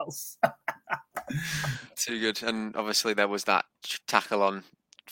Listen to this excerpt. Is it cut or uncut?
cut